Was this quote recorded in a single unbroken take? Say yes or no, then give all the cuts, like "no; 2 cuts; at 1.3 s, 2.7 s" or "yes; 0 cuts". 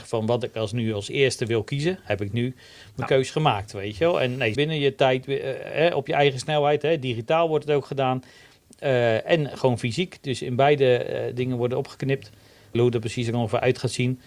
no; 2 cuts; at 4.5 s, 12.7 s